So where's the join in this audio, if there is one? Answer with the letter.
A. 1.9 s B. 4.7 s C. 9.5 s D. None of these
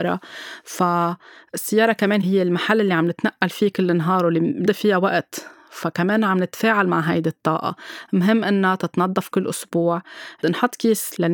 B